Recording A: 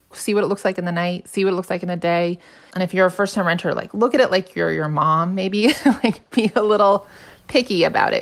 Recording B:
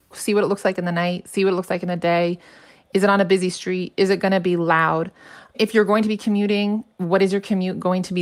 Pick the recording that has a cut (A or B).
A